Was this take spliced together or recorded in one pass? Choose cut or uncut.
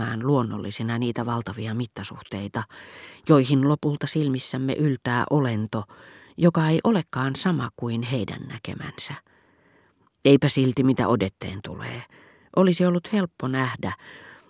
uncut